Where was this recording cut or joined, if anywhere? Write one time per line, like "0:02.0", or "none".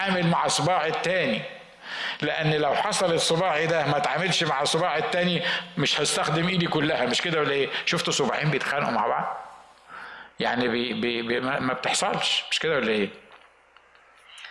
0:11.6